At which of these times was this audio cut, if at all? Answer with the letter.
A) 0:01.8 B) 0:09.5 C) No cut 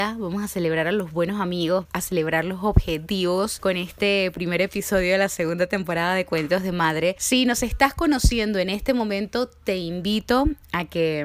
A